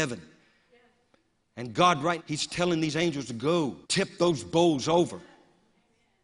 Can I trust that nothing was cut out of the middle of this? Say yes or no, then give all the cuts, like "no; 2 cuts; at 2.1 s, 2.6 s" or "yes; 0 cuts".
no; 2 cuts; at 2.2 s, 3.8 s